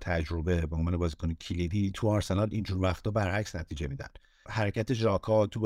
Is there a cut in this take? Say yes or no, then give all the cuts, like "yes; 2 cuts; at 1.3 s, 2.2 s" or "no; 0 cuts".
yes; 1 cut; at 4.4 s